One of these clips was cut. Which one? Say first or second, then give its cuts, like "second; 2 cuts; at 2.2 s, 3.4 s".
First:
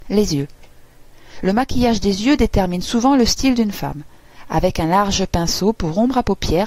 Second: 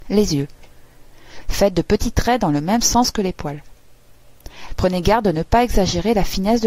second; 2 cuts; at 1.4 s, 4.7 s